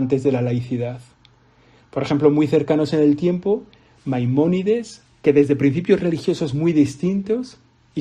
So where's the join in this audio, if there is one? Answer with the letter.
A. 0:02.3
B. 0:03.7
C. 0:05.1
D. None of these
C